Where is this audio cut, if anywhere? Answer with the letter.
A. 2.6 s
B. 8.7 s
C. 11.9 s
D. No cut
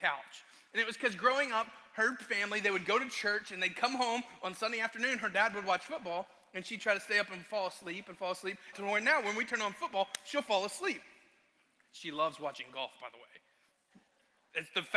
B